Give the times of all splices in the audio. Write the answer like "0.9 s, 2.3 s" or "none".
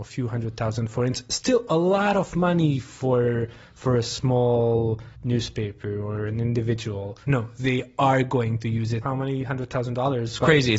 5.1 s, 7.3 s, 9.0 s